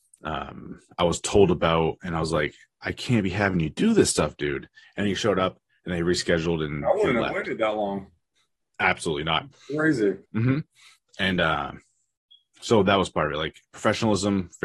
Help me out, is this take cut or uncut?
cut